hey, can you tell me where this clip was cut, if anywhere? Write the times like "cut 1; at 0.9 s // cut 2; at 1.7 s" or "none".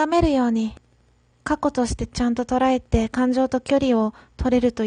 cut 1; at 1.3 s